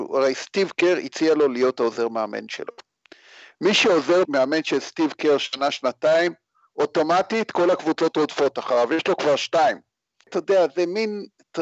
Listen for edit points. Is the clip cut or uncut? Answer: cut